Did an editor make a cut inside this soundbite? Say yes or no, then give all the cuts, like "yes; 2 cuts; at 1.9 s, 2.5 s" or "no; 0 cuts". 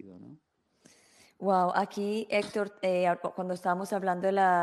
no; 0 cuts